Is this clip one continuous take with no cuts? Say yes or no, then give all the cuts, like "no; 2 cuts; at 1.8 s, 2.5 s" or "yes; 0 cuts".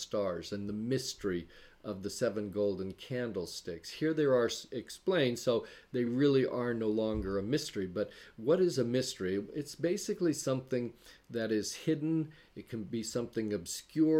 yes; 0 cuts